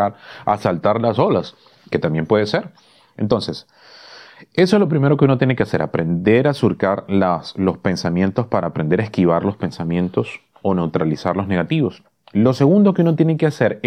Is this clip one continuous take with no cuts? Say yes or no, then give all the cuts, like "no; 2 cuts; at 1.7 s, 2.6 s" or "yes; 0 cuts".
yes; 0 cuts